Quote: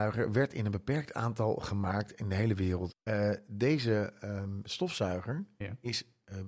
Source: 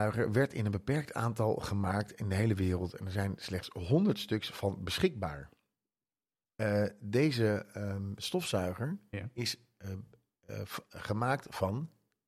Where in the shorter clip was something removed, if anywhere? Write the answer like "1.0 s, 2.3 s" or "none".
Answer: 2.9 s